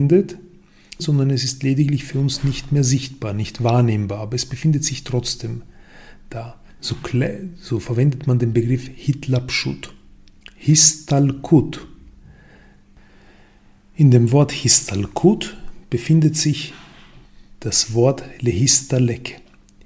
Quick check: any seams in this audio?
yes; 3 cuts; at 1.0 s, 6.7 s, 10.4 s

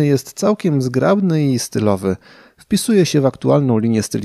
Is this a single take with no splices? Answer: yes; 0 cuts

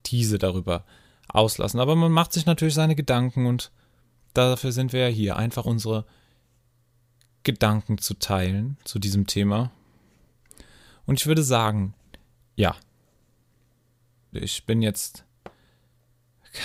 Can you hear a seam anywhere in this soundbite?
yes; 2 cuts; at 5.6 s, 14.3 s

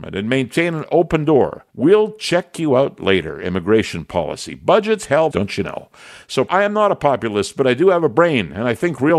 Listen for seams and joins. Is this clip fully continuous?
no; 3 cuts; at 1.7 s, 5.3 s, 6.5 s

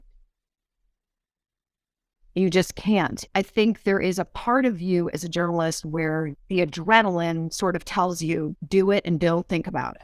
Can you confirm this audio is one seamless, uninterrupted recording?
no; 2 cuts; at 3.3 s, 8.6 s

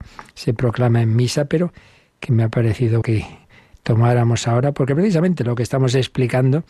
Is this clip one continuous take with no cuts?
no; 1 cut; at 3.0 s

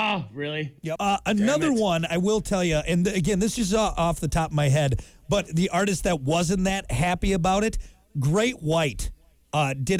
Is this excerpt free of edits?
no; 1 cut; at 1.0 s

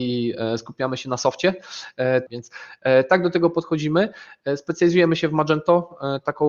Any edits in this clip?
yes; 1 cut; at 2.3 s

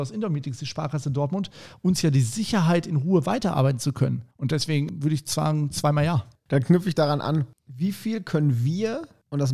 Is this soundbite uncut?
yes; 0 cuts

